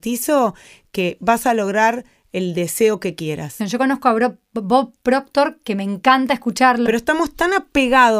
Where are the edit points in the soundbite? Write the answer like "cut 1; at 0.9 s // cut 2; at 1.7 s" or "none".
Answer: cut 1; at 3.6 s // cut 2; at 6.9 s